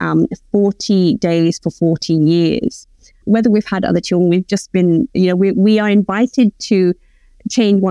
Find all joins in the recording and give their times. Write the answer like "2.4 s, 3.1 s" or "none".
3.2 s